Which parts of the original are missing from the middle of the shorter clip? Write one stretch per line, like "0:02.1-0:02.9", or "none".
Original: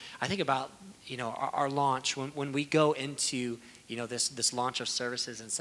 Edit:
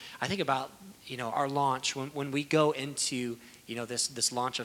0:01.3-0:01.5